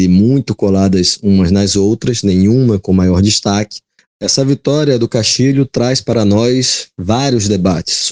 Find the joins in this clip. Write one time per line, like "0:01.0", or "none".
0:04.0